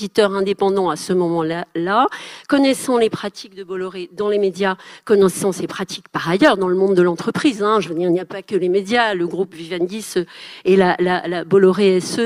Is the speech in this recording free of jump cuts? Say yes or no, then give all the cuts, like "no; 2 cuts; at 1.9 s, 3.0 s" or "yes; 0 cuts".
yes; 0 cuts